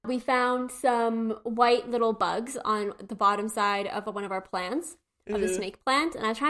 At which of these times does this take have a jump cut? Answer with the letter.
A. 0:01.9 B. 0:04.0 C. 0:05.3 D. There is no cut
D